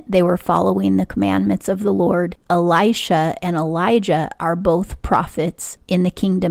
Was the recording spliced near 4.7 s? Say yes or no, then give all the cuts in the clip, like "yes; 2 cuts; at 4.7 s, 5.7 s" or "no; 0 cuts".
no; 1 cut; at 2.4 s